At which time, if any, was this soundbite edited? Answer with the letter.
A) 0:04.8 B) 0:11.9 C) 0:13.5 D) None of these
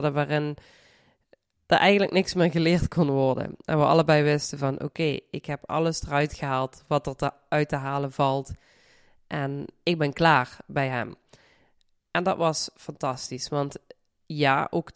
D